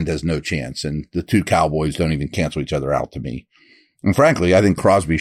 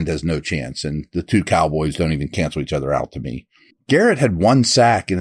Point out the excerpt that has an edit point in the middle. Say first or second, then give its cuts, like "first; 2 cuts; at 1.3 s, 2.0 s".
second; 1 cut; at 3.7 s